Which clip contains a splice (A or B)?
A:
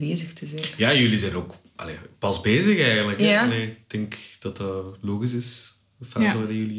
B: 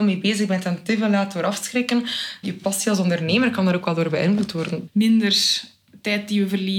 B